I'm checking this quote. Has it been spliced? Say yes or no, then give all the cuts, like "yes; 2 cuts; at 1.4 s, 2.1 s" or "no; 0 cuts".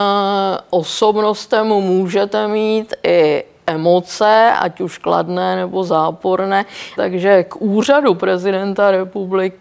yes; 1 cut; at 7.0 s